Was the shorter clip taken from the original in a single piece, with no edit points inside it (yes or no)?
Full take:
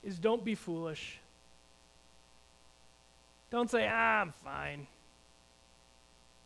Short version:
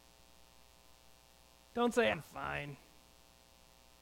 no